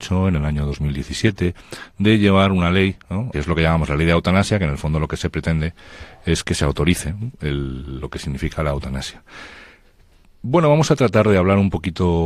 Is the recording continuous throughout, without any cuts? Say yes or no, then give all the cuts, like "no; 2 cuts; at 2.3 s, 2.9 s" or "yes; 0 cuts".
no; 1 cut; at 3.3 s